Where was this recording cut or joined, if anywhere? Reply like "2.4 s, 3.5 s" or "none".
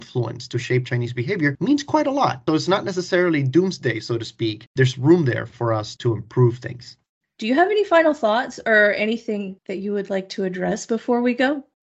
none